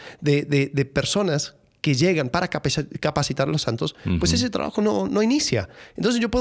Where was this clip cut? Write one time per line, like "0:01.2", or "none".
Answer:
0:05.1